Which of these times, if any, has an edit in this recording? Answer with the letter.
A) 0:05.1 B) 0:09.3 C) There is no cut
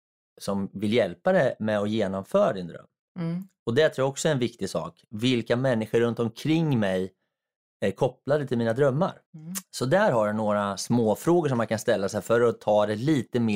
B